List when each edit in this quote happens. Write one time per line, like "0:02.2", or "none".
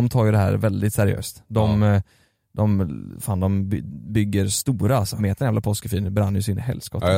0:05.2